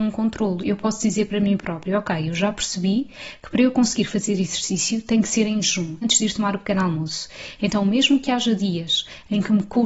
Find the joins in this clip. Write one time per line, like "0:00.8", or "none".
0:06.0

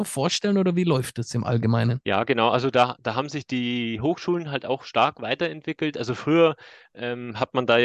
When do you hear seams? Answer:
none

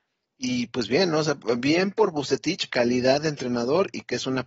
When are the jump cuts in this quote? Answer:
0:02.7

